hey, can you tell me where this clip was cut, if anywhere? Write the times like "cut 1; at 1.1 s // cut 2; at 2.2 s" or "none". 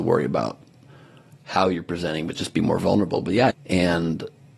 cut 1; at 3.5 s

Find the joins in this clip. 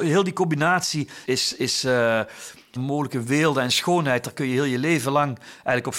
cut 1; at 1.2 s // cut 2; at 2.8 s

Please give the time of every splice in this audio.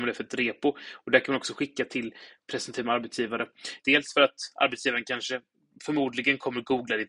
cut 1; at 3.8 s

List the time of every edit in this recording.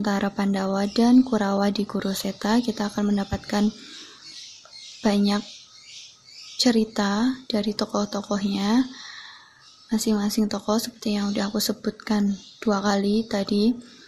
none

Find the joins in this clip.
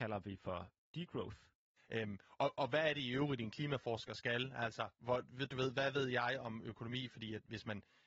cut 1; at 1.8 s

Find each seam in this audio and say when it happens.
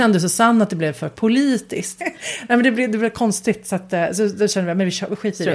cut 1; at 2.0 s

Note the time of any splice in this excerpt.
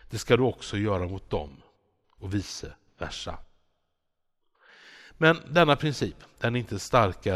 none

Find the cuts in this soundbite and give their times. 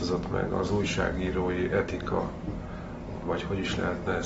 cut 1; at 3.2 s

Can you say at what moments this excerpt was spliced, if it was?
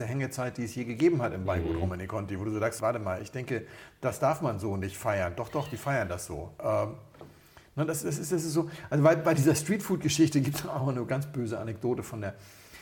cut 1; at 2.8 s

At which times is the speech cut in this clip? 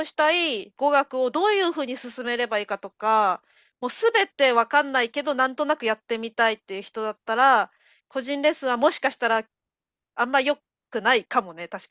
none

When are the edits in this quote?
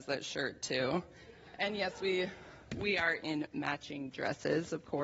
none

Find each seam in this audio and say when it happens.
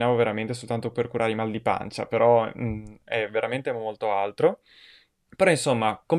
cut 1; at 5.3 s

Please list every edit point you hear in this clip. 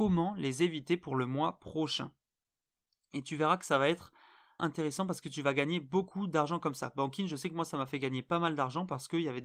cut 1; at 4.6 s

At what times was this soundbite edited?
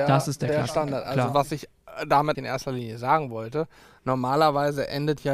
cut 1; at 2.3 s

